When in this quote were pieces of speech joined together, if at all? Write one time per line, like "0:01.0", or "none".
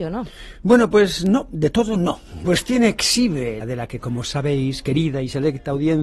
0:02.4
0:03.6